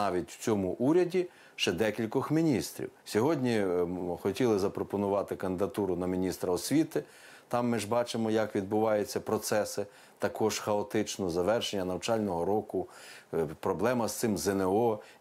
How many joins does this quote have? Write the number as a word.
one